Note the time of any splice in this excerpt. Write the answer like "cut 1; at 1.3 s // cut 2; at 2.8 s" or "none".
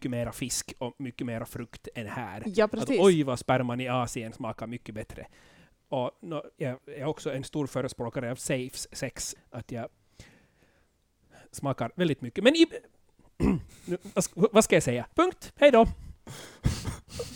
cut 1; at 9.4 s // cut 2; at 15.1 s